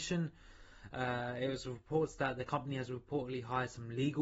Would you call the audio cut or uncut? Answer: uncut